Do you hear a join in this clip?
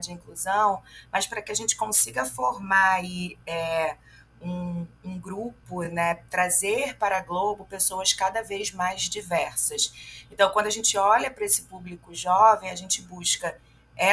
no; 0 cuts

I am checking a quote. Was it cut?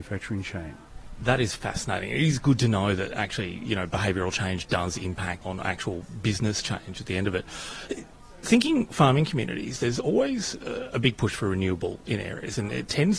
yes; 1 cut; at 5.4 s

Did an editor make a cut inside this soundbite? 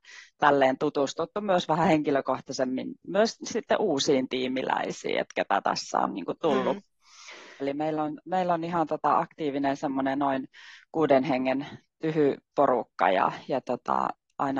yes; 1 cut; at 7.6 s

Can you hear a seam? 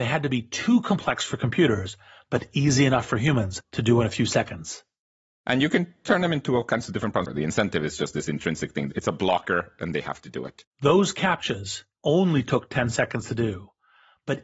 yes; 2 cuts; at 7.3 s, 10.7 s

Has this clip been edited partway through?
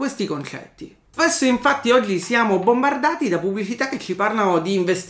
yes; 1 cut; at 1.1 s

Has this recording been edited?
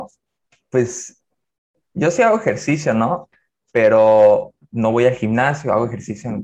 no; 0 cuts

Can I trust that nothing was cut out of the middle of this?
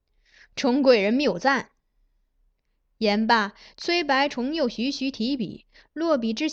yes; 0 cuts

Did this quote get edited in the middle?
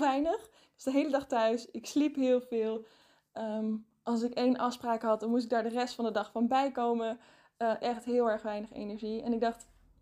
yes; 1 cut; at 7.8 s

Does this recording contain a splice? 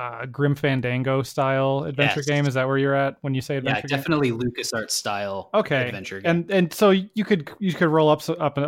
no; 0 cuts

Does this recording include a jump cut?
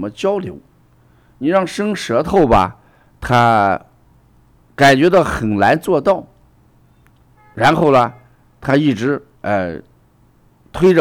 no; 0 cuts

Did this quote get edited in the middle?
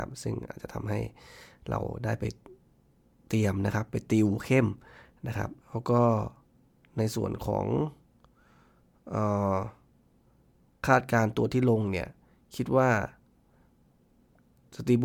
yes; 1 cut; at 5.6 s

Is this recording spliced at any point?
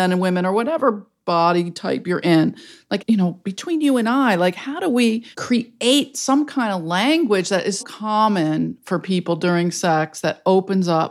yes; 3 cuts; at 3.0 s, 5.3 s, 7.8 s

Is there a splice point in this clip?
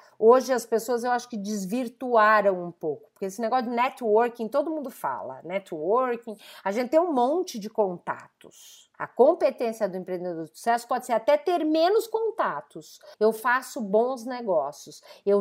yes; 2 cuts; at 8.9 s, 13.1 s

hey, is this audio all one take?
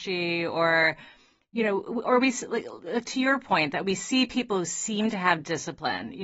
yes; 0 cuts

